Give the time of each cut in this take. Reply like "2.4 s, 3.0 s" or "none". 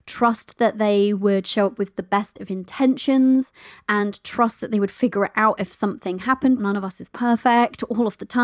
6.6 s

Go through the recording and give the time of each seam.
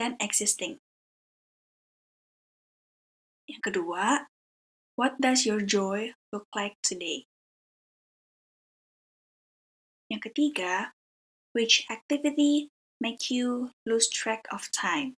none

